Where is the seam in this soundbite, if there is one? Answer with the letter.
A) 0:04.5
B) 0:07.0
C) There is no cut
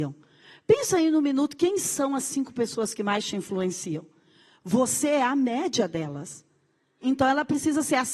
B